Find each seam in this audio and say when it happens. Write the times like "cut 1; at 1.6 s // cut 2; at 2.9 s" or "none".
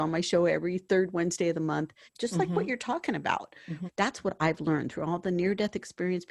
cut 1; at 2.1 s // cut 2; at 3.9 s